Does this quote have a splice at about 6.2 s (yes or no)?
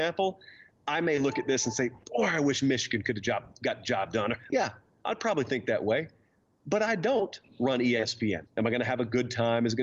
no